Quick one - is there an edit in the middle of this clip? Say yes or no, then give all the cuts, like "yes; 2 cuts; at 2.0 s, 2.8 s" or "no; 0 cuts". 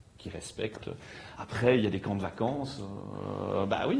no; 0 cuts